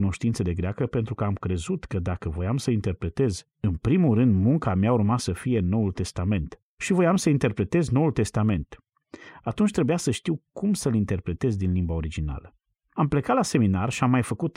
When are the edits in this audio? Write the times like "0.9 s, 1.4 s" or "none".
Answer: none